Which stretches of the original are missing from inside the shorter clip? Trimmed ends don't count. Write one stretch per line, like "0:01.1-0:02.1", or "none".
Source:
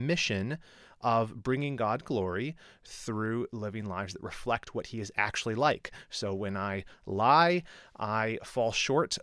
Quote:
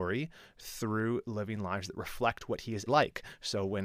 0:05.1-0:05.5